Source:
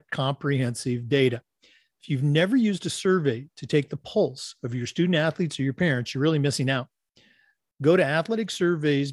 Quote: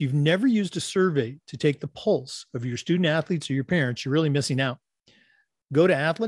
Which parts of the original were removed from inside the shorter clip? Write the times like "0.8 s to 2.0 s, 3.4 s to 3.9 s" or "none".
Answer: none